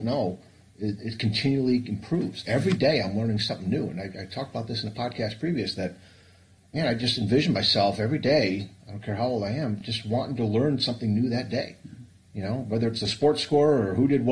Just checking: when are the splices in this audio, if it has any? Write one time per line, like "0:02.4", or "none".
none